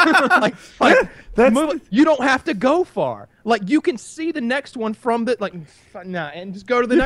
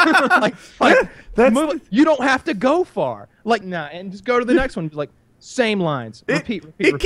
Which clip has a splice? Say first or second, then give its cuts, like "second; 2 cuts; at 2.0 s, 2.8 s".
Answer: second; 1 cut; at 3.6 s